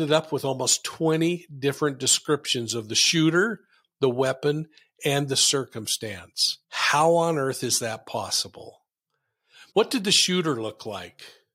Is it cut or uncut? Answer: cut